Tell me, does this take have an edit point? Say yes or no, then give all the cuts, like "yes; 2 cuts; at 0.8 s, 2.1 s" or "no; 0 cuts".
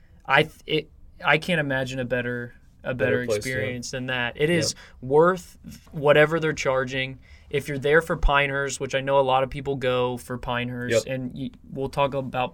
yes; 1 cut; at 5.9 s